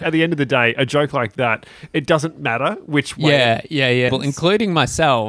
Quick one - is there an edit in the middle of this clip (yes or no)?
yes